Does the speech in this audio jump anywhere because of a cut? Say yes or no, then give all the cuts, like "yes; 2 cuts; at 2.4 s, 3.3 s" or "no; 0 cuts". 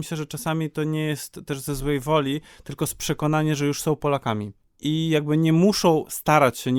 no; 0 cuts